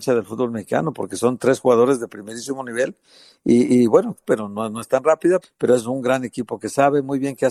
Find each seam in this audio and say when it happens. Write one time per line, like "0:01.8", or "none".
0:04.2
0:05.4